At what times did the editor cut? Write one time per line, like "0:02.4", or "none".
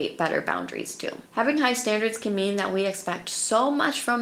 0:01.3